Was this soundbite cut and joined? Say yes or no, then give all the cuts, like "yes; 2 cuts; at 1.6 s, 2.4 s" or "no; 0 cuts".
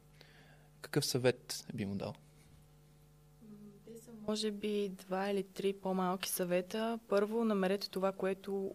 no; 0 cuts